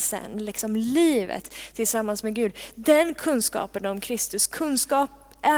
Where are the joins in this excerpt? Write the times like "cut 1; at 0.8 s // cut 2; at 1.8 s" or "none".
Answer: none